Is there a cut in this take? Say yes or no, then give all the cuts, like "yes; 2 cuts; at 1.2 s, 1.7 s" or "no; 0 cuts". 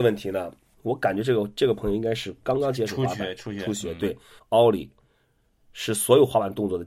yes; 1 cut; at 4.4 s